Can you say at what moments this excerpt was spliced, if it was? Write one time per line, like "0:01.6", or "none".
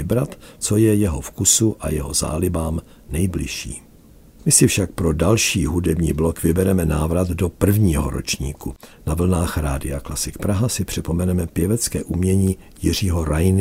none